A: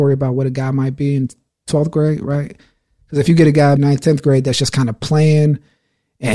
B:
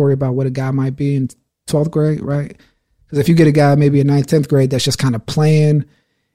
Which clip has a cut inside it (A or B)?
A